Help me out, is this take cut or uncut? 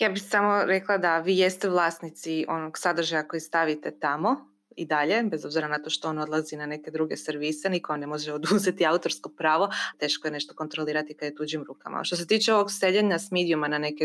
cut